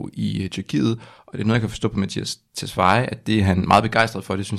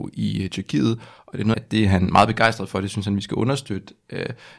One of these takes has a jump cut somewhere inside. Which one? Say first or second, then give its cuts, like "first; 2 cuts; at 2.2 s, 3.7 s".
second; 1 cut; at 1.5 s